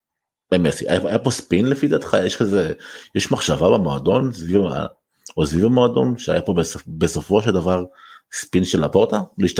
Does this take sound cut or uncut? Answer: uncut